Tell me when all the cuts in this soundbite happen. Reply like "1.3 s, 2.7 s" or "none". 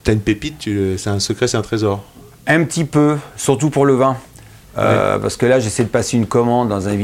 none